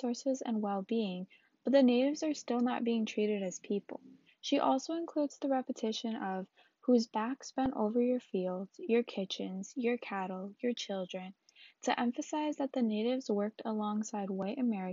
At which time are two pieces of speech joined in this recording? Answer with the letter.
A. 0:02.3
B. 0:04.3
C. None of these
B